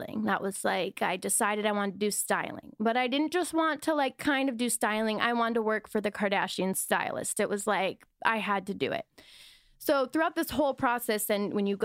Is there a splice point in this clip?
no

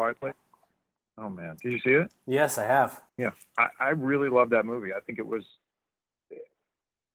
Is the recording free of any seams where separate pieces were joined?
no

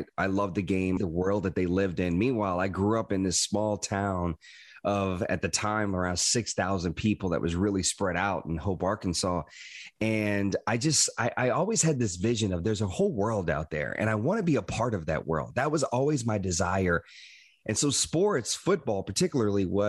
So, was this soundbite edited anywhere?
yes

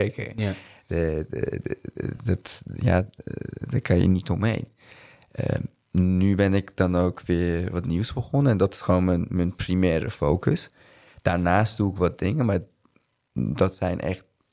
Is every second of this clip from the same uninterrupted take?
yes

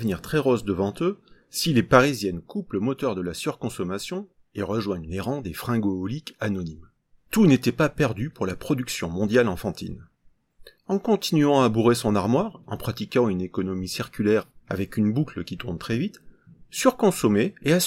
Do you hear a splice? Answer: yes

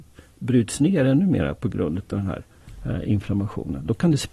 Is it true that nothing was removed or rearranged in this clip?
yes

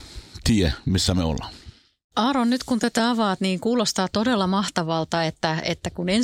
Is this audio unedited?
yes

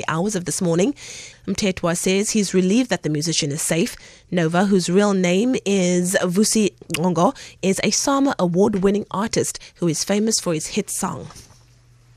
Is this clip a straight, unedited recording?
no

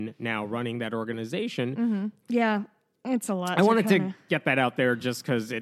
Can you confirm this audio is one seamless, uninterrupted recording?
no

